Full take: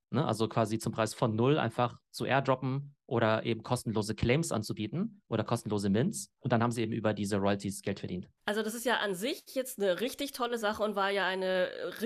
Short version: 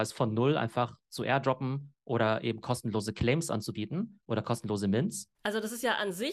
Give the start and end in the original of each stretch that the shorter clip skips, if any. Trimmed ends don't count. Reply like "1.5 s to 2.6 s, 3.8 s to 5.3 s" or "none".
6.3 s to 8.3 s